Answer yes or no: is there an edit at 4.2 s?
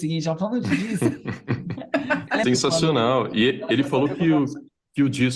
no